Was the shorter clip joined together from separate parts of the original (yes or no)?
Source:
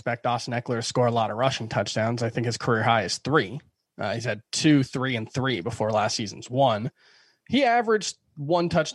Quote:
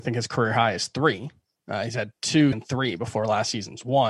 yes